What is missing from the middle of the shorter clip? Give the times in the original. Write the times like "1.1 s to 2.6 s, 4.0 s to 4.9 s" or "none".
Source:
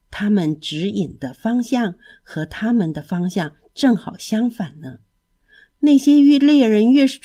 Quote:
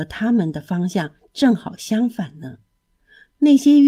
none

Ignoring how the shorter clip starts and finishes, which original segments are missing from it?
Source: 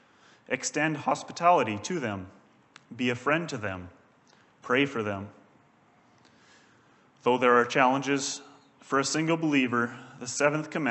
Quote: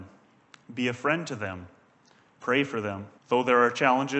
5.4 s to 7.1 s

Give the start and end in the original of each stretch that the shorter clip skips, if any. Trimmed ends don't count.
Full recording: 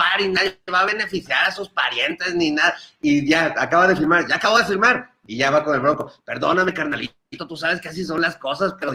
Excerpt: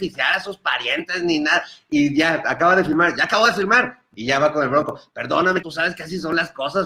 6.7 s to 7.5 s

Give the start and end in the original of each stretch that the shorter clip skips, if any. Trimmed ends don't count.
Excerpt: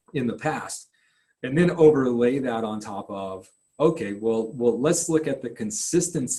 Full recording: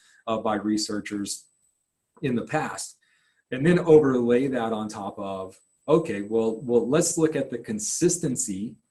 none

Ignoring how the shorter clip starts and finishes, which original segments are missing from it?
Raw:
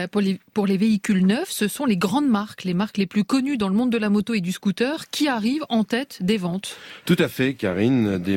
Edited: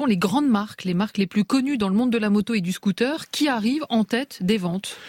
none

